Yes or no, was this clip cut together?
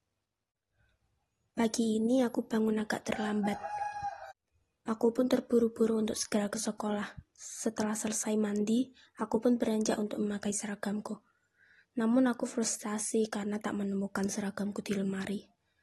no